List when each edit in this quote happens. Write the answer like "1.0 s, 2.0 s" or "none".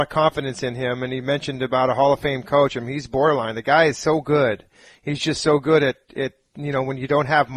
none